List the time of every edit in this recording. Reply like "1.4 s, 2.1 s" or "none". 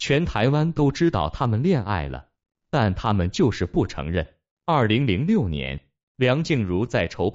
none